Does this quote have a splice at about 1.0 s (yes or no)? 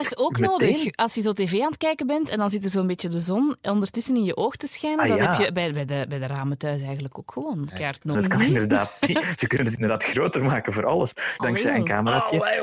no